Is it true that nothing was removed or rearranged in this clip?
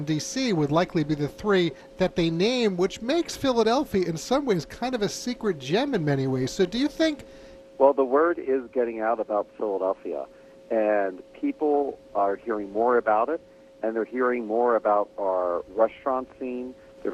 no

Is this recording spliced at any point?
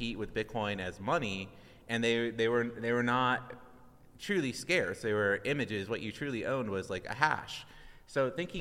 no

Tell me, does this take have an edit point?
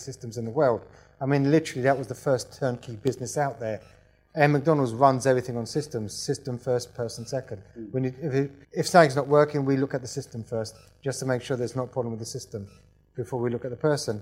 yes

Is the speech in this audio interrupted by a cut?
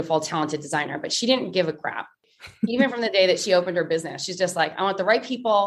no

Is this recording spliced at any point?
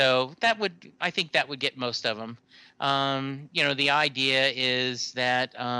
no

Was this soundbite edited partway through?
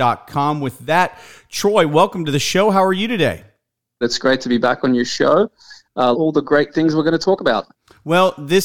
yes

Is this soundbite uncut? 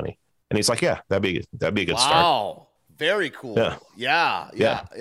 yes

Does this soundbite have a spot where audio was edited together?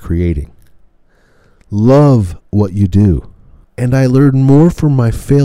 yes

